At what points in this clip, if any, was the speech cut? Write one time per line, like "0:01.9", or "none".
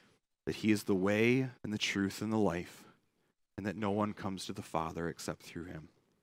0:01.5